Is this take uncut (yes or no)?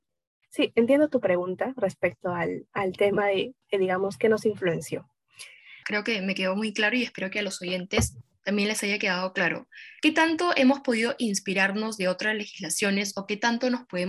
no